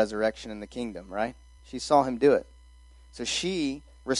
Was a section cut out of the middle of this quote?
yes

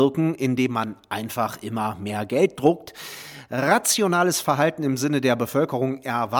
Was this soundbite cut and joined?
no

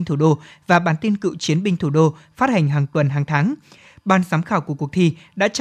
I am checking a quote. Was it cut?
no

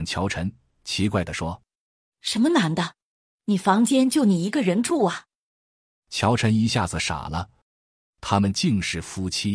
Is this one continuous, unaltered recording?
no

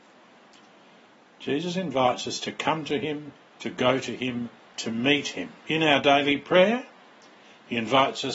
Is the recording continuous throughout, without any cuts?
no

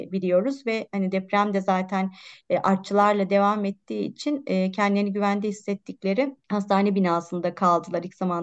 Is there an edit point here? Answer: yes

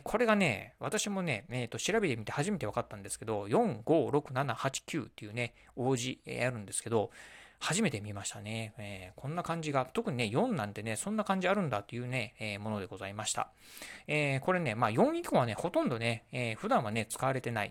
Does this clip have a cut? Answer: no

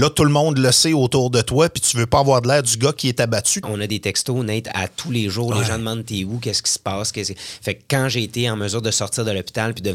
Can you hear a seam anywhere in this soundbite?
yes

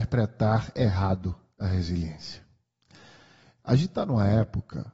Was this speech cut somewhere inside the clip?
no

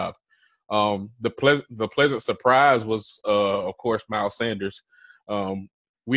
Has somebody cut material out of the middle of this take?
no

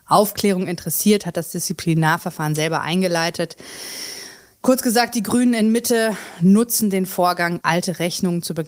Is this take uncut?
no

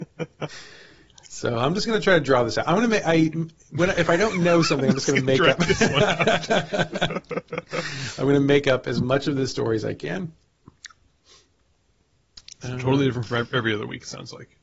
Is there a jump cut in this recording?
no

